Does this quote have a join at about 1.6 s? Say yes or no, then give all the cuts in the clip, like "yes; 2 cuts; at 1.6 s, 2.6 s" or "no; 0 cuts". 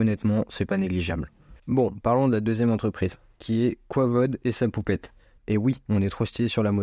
yes; 2 cuts; at 1.6 s, 5.4 s